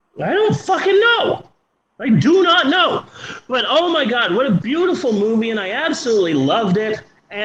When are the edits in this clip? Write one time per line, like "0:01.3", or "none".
none